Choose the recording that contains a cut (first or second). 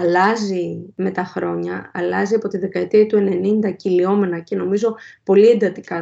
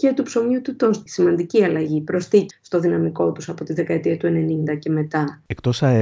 second